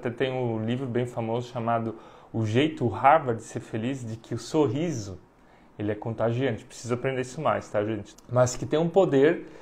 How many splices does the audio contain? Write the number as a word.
one